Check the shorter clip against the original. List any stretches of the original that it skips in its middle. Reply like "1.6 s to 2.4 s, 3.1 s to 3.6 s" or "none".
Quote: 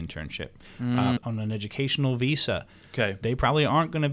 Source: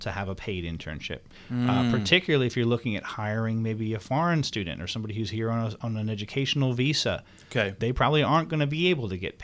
1.9 s to 5.7 s